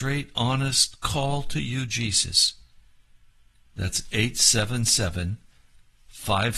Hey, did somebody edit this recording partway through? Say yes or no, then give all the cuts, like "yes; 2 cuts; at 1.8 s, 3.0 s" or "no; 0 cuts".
yes; 1 cut; at 3.7 s